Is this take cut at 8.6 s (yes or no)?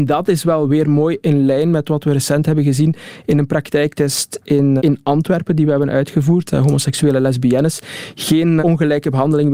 yes